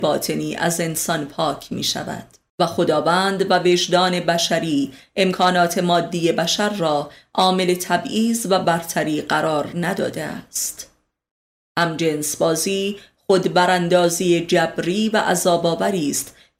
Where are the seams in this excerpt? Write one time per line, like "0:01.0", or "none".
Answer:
0:02.5
0:11.6